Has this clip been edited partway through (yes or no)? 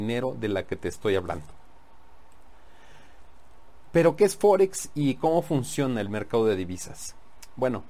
no